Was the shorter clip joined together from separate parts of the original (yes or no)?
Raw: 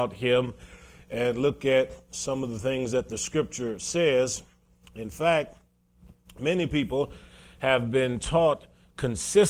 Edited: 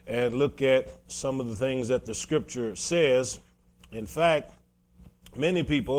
no